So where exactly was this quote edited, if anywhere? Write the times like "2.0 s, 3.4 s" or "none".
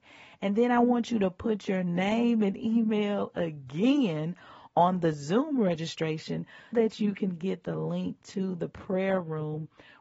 6.7 s